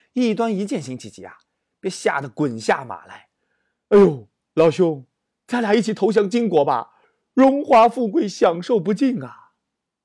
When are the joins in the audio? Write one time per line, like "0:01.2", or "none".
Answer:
none